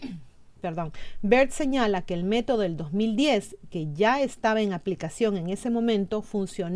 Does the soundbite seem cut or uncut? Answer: uncut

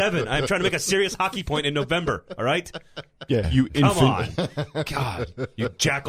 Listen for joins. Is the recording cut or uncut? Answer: cut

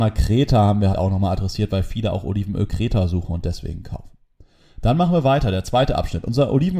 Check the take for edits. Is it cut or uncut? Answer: cut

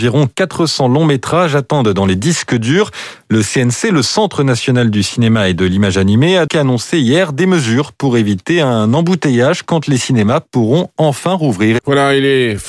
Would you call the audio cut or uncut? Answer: cut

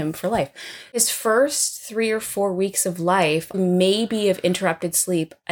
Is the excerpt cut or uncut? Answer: cut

